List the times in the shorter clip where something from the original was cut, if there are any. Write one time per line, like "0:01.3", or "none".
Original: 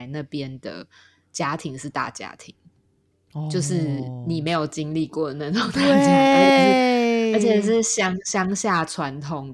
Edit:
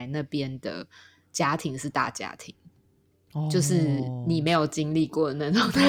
none